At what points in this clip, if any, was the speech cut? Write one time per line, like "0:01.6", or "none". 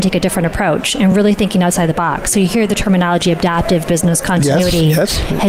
none